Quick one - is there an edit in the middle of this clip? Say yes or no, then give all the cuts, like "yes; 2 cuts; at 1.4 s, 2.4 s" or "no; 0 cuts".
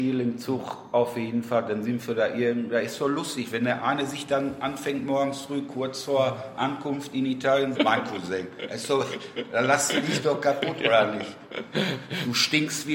yes; 1 cut; at 7.7 s